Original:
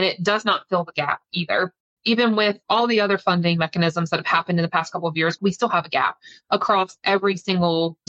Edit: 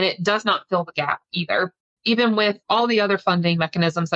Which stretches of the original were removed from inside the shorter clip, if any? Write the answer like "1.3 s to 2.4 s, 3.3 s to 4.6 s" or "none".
none